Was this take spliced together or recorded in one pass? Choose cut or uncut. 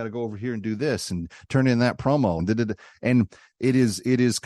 cut